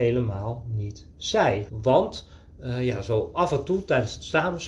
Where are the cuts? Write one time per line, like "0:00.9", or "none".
0:01.7